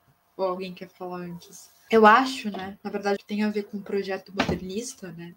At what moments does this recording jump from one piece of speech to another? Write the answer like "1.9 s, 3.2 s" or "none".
1.9 s, 3.2 s